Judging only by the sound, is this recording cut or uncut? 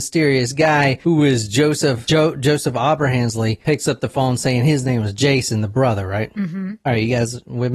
uncut